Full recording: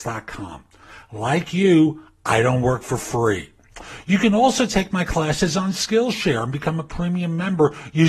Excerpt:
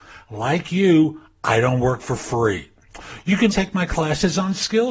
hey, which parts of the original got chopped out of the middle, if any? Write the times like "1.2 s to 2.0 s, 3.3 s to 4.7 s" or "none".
4.3 s to 4.7 s